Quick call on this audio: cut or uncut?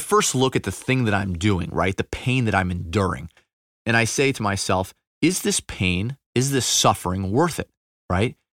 uncut